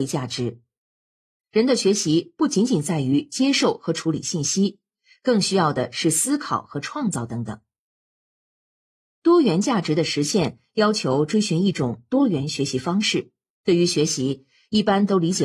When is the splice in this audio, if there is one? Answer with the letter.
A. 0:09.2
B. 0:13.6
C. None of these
B